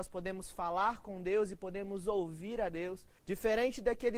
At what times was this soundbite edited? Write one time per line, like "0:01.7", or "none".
0:03.2